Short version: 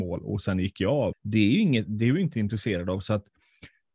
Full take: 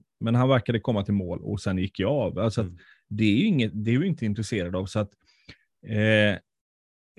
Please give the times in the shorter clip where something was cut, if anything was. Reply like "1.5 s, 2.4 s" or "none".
1.1 s